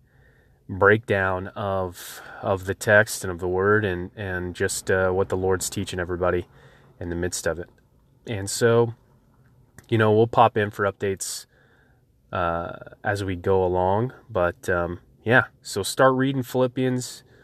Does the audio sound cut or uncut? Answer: uncut